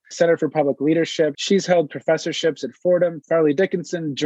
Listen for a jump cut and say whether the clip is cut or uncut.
cut